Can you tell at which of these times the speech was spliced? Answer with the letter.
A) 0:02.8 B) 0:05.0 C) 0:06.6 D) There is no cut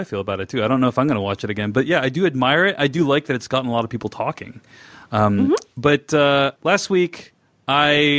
C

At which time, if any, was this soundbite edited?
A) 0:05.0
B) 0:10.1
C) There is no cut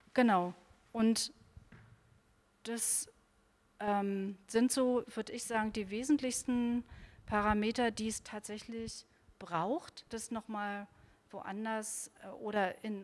B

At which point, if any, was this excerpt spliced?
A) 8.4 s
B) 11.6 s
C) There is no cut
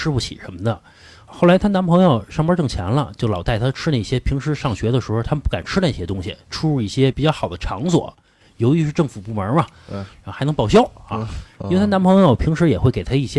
B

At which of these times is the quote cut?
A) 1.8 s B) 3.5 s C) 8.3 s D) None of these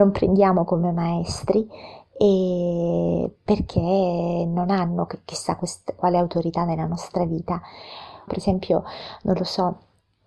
C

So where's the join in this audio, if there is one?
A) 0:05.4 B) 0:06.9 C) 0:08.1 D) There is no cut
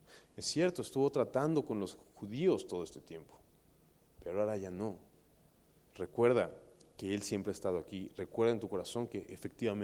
D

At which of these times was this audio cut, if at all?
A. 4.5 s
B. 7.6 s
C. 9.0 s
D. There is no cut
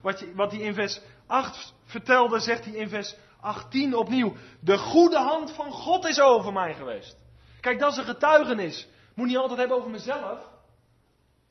D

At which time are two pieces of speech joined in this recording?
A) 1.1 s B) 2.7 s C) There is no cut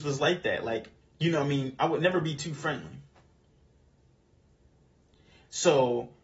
A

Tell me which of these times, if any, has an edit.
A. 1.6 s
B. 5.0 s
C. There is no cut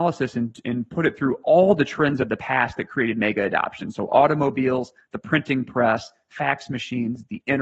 C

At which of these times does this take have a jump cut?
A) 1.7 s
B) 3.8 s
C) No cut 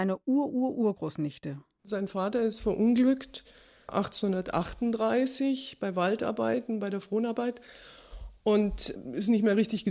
C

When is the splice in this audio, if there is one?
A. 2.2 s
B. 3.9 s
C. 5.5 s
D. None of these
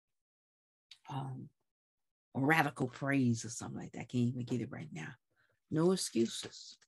C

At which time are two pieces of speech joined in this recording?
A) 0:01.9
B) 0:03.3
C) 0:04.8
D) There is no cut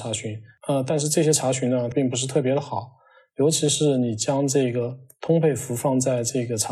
A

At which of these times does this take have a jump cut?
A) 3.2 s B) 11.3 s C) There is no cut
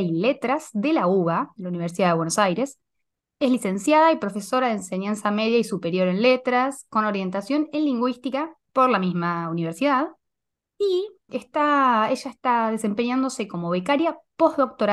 B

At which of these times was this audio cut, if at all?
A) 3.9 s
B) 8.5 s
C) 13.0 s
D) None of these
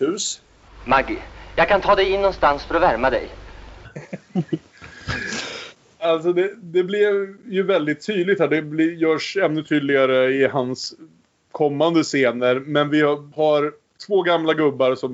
A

